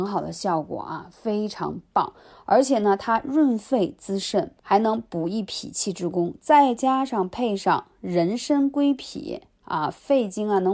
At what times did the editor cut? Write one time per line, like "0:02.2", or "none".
0:04.6